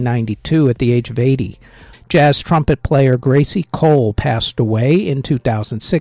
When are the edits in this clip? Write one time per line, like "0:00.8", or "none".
0:01.9